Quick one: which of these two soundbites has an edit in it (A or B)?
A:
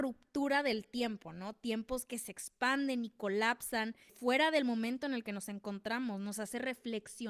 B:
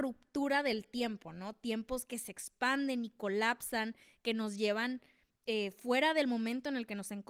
A